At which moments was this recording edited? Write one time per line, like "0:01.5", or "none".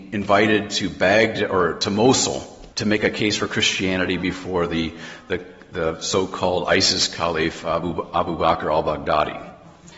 0:02.7